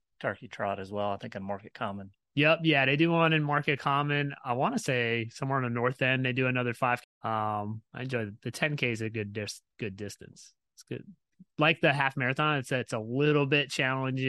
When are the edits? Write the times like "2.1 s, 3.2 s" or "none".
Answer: 7.0 s